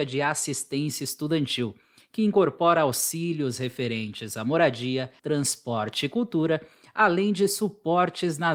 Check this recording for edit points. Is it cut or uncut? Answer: cut